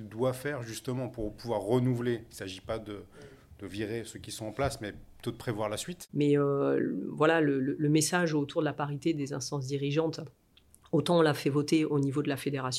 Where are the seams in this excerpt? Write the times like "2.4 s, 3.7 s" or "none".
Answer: 6.1 s